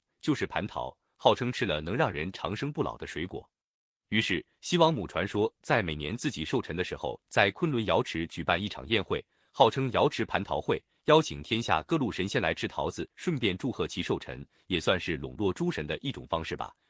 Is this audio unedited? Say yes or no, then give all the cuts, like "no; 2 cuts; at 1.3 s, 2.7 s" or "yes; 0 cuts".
yes; 0 cuts